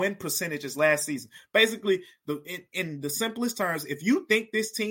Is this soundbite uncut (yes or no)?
yes